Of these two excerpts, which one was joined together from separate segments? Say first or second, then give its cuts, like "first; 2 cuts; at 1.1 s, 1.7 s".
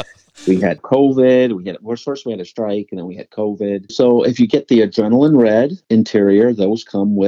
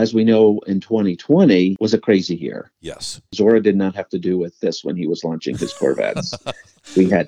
first; 1 cut; at 3.9 s